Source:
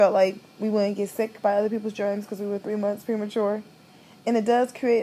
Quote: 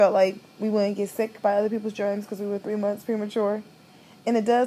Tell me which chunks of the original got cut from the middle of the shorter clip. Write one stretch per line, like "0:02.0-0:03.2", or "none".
none